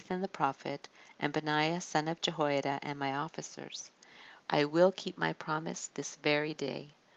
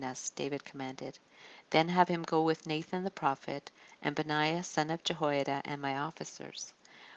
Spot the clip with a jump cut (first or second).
first